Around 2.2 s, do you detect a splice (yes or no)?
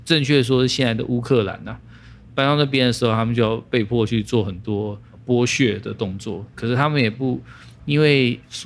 no